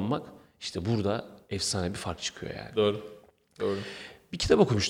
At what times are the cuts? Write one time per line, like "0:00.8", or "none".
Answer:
none